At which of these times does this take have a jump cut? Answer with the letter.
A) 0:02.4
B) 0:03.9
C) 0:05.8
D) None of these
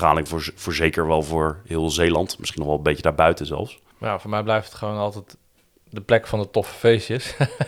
B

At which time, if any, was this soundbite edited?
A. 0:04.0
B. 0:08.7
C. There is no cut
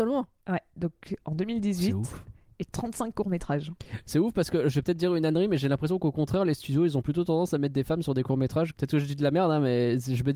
B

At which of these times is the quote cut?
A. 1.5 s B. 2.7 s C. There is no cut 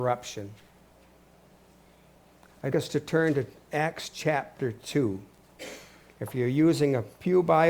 B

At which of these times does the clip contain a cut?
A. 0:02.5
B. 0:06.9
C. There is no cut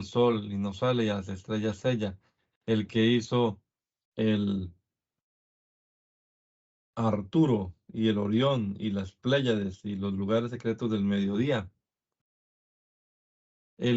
A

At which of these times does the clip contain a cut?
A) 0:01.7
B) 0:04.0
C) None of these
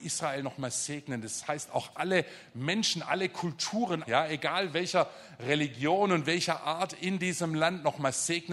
B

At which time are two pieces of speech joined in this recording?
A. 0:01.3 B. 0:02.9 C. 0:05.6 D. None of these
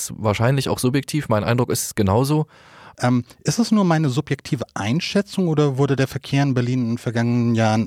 B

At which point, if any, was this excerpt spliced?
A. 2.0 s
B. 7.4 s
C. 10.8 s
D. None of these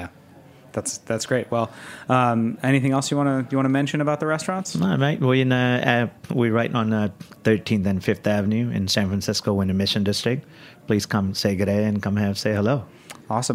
B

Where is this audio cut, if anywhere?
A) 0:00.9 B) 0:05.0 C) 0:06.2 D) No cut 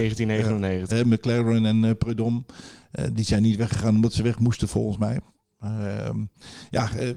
A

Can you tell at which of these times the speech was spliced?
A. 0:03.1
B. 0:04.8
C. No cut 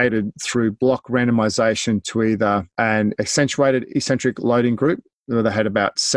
C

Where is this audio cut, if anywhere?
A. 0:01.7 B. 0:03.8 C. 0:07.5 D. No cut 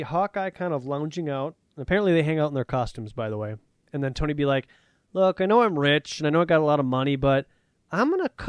B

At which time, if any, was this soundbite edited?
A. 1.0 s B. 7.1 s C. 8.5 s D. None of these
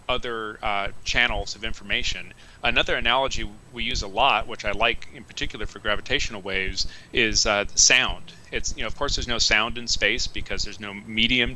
D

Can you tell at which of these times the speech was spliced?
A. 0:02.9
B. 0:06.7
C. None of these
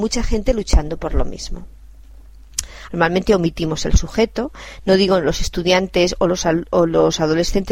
A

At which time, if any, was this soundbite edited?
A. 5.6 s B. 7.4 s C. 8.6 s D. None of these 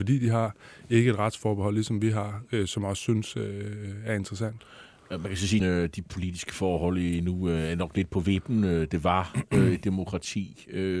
A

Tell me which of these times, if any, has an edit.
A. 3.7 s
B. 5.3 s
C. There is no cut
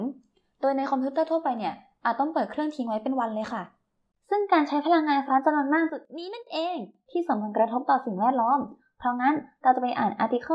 B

